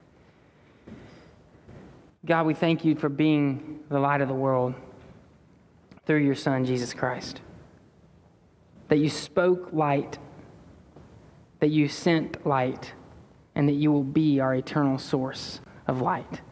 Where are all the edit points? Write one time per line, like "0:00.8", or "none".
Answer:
none